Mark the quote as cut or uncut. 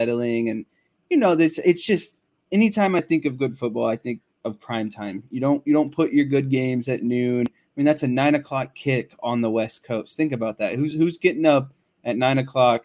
uncut